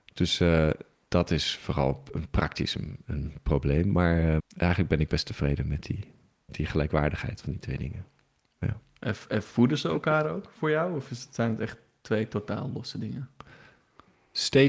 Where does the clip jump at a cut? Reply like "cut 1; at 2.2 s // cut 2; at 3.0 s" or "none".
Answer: cut 1; at 4.4 s